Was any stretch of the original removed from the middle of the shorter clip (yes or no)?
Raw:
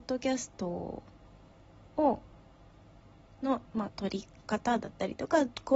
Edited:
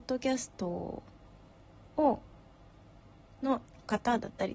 yes